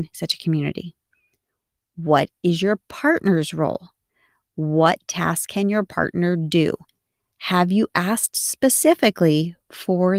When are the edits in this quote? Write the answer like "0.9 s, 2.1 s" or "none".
none